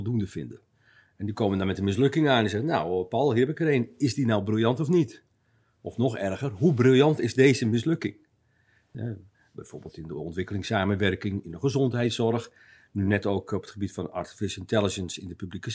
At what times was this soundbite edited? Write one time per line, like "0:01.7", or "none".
0:08.9